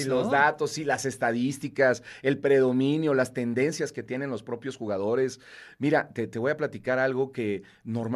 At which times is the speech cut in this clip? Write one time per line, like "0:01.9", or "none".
none